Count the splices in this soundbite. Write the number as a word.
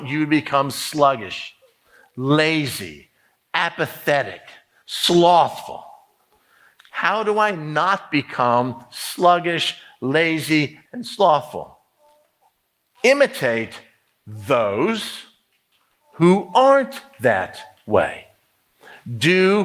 one